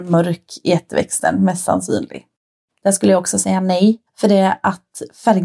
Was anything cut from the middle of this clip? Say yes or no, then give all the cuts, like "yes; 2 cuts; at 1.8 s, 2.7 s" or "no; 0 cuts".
yes; 2 cuts; at 2.7 s, 4.1 s